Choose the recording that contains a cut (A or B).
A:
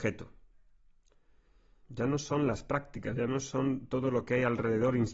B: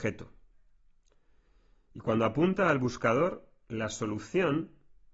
A